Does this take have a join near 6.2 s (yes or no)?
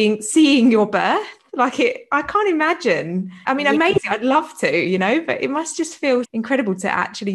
yes